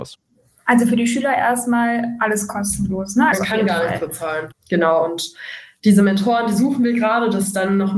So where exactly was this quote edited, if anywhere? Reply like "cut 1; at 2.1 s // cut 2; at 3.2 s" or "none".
cut 1; at 3.3 s // cut 2; at 4.5 s